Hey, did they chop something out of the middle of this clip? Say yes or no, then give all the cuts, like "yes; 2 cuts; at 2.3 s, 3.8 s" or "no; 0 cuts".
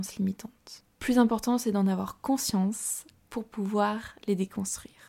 no; 0 cuts